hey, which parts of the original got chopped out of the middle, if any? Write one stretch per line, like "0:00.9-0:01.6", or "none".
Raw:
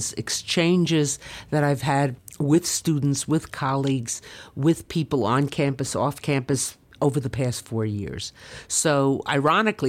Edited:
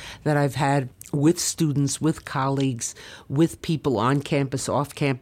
none